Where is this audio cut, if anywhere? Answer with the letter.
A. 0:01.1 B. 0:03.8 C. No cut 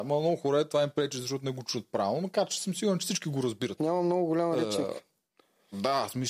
B